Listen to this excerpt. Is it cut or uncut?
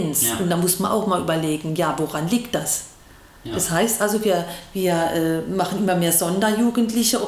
uncut